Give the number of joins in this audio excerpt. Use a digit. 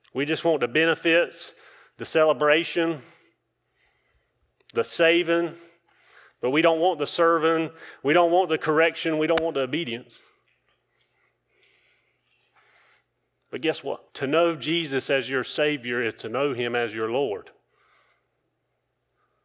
1